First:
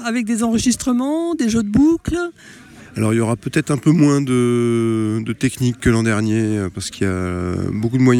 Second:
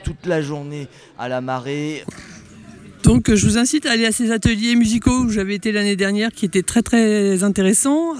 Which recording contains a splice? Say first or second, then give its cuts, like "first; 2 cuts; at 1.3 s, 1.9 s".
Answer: second; 1 cut; at 2.0 s